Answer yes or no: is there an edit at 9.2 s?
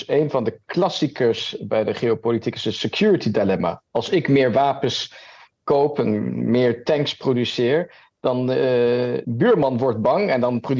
yes